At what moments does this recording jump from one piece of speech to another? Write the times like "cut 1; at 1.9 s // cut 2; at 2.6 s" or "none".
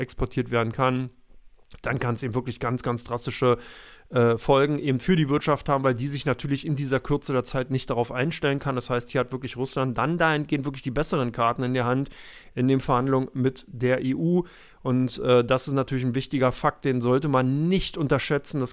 none